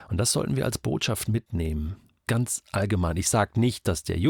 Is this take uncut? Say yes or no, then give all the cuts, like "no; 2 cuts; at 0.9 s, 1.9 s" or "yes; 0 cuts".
no; 1 cut; at 2.3 s